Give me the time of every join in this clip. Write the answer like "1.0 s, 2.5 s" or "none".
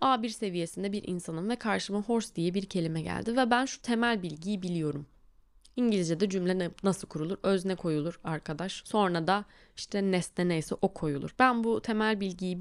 8.8 s, 10.8 s